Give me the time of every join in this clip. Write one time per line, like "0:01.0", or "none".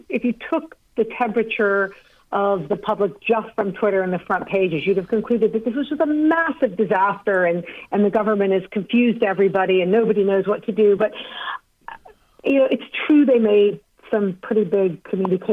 none